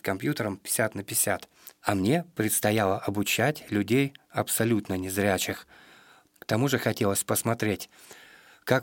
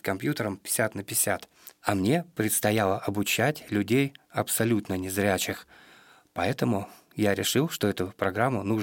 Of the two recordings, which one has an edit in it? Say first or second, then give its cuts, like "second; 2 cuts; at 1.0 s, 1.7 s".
first; 1 cut; at 6.3 s